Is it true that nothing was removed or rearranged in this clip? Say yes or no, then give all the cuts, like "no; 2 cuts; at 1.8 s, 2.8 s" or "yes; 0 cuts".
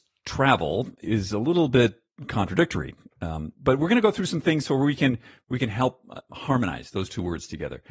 yes; 0 cuts